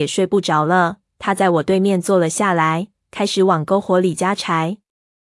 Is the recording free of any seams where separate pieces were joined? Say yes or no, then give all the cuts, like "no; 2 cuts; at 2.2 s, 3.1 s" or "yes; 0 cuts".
yes; 0 cuts